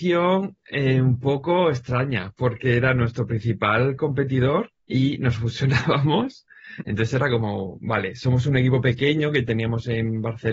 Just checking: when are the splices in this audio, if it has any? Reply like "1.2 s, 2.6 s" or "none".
4.8 s, 6.8 s